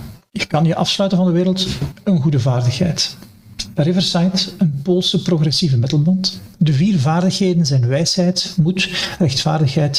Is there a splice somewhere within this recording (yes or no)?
yes